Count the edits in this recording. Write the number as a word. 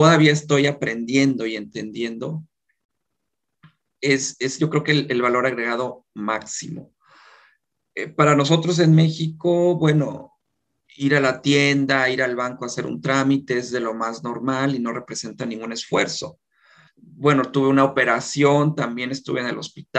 one